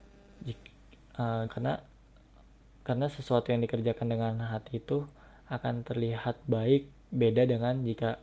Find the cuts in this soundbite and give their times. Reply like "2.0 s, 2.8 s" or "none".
1.5 s